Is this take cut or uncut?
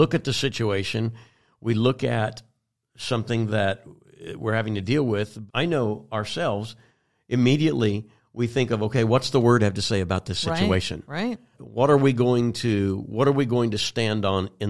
cut